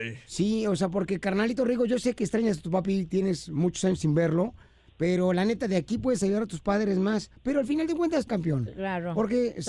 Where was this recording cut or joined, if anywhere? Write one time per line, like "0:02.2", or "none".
0:08.3